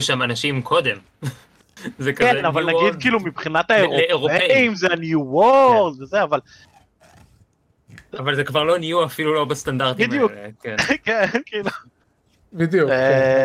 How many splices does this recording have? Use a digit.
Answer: 0